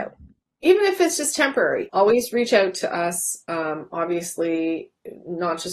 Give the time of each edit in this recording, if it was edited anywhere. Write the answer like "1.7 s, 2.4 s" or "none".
1.9 s